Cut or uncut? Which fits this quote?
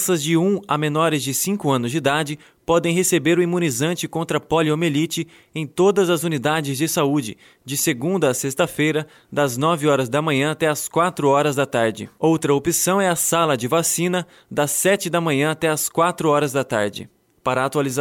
uncut